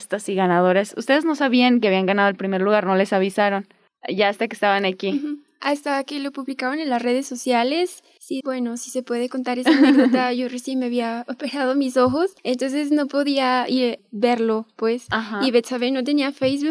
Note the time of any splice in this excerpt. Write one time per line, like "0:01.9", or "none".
0:08.4

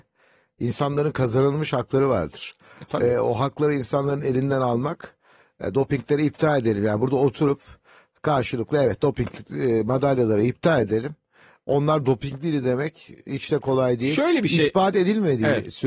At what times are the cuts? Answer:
none

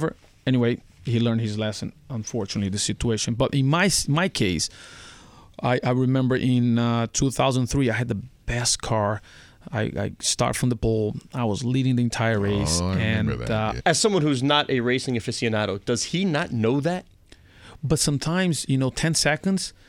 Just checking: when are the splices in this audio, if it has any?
0:13.8

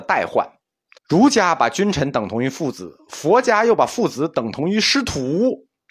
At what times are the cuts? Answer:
0:01.0

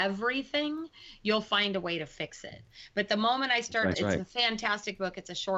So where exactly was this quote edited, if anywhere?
0:03.9

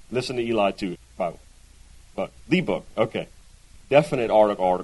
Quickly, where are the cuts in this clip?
0:01.0

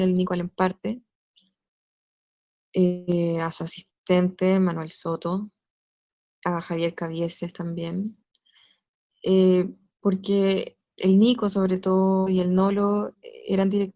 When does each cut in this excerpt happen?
none

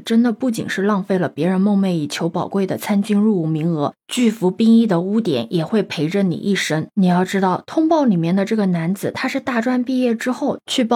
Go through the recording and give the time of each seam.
none

